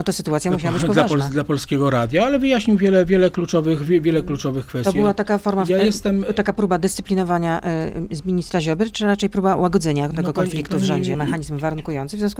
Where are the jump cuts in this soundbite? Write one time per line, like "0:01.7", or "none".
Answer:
0:11.1

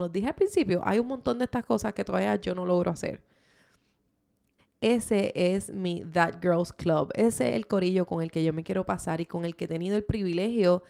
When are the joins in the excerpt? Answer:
0:04.6

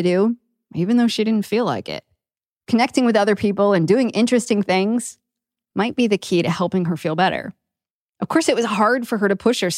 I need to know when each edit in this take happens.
none

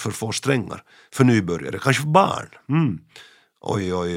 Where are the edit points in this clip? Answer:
none

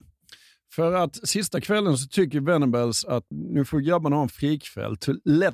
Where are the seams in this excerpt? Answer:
0:03.3

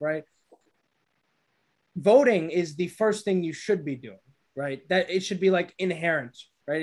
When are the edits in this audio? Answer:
none

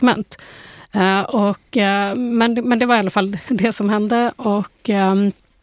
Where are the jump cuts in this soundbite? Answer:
none

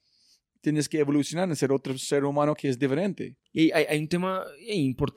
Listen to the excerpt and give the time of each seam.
0:03.4

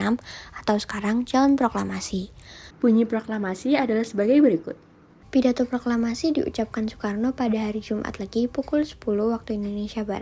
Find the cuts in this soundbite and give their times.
0:02.7
0:05.2

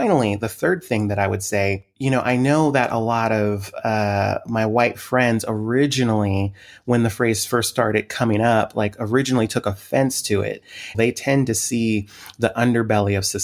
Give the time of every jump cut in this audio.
0:10.9

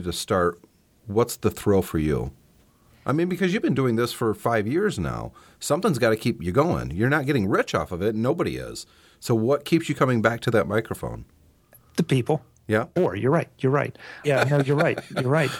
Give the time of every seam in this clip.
0:13.0
0:14.2

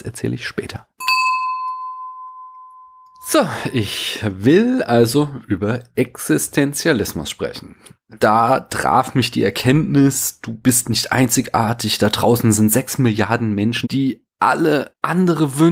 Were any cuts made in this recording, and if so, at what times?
0:08.2
0:13.8

